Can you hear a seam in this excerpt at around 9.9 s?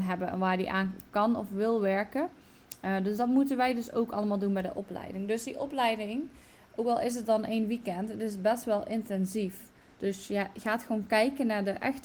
yes; 1 cut; at 9.9 s

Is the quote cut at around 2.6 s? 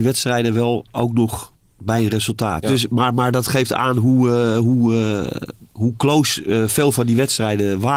yes; 1 cut; at 2.6 s

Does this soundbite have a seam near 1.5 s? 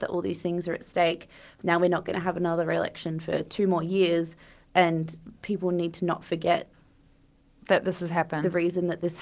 no; 0 cuts

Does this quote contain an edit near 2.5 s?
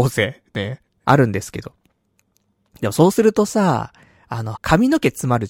no; 2 cuts; at 1.0 s, 4.5 s

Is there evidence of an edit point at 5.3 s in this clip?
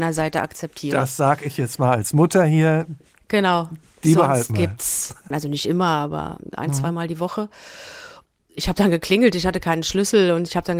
yes; 1 cut; at 5.3 s

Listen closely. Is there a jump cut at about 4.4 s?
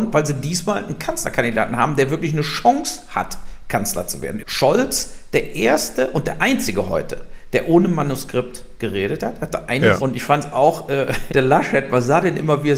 yes; 3 cuts; at 4.4 s, 10.0 s, 11.3 s

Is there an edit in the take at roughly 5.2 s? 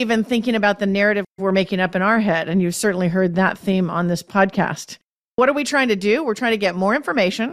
no; 0 cuts

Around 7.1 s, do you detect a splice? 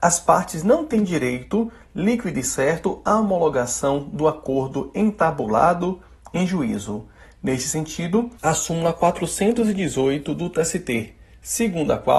no; 1 cut; at 8.4 s

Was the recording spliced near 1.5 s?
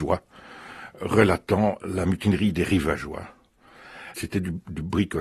no; 1 cut; at 4.1 s

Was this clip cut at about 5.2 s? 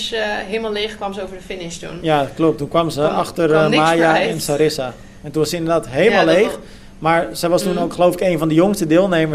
no; 0 cuts

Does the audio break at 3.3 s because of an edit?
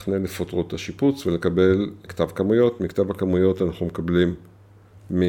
no; 1 cut; at 2.1 s

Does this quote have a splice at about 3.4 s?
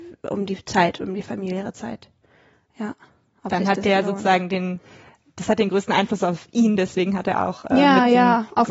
no; 0 cuts

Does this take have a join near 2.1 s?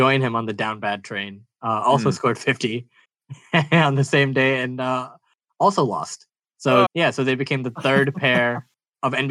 no; 1 cut; at 6.9 s

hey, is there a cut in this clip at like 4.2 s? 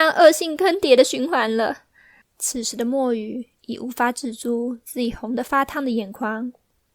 no; 1 cut; at 2.2 s

